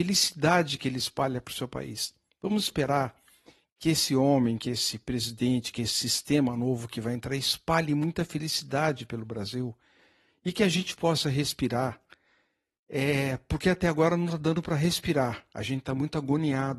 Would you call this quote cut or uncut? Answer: uncut